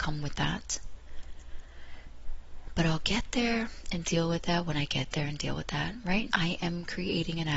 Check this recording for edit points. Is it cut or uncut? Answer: cut